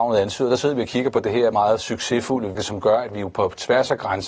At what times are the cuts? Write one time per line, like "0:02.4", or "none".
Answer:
0:01.5
0:02.5